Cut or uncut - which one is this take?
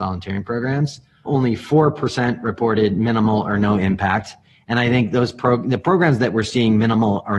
cut